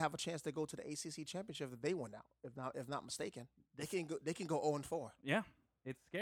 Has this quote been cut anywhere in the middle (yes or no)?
yes